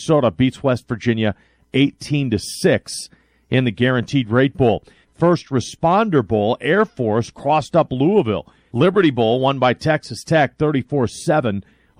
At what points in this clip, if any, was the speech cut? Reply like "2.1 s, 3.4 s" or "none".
5.0 s, 8.7 s

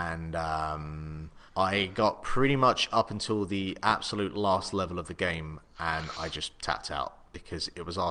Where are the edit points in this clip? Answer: 1.5 s

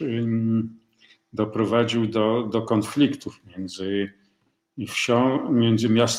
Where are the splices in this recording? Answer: none

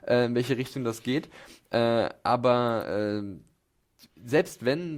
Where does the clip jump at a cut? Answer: none

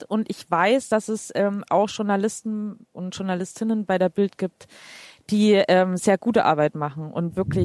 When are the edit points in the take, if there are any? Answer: none

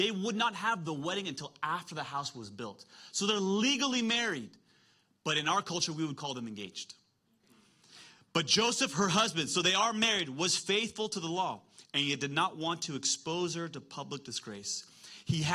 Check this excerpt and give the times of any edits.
none

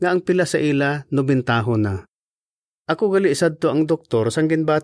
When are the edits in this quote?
2.8 s

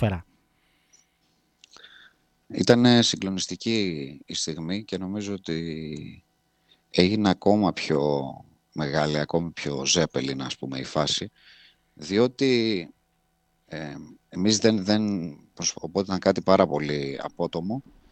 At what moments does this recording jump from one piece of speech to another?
15.7 s

